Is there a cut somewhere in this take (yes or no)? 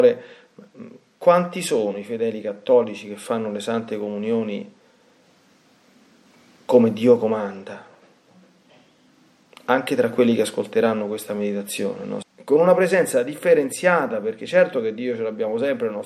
yes